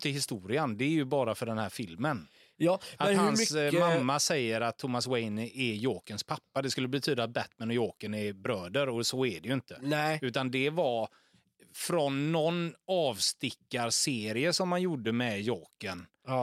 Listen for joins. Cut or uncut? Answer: uncut